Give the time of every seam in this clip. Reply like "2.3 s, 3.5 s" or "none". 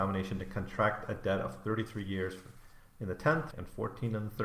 3.5 s